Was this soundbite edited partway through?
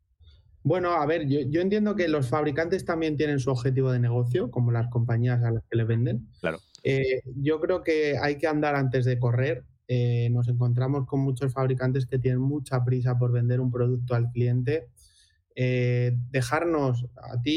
no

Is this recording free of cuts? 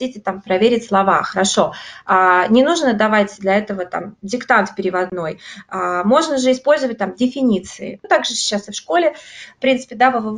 no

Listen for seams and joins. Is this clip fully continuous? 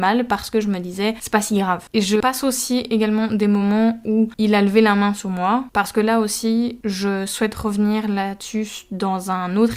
yes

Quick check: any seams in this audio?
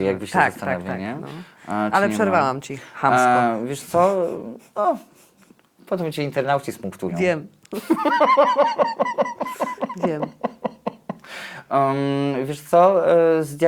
no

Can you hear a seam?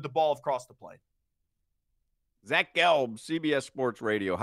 no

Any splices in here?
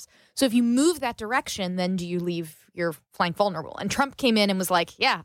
no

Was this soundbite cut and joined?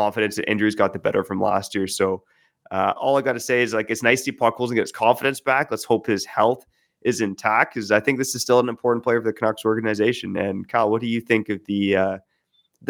no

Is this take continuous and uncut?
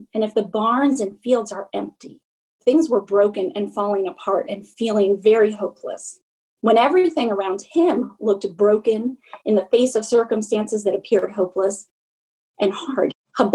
no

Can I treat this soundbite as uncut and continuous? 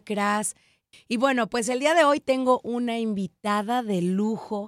no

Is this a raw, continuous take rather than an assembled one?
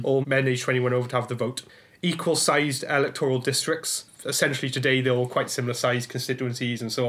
yes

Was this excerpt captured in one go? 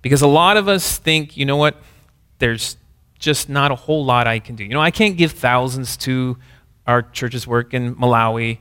yes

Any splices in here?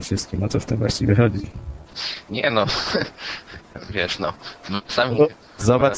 no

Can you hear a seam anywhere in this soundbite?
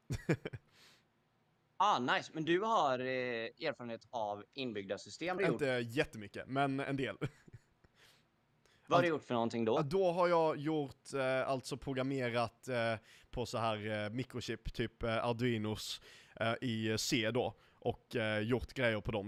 yes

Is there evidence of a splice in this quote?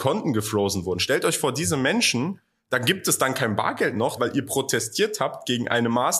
yes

